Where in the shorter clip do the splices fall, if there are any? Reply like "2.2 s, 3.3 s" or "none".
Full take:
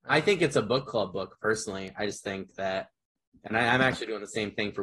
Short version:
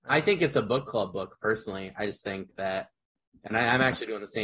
none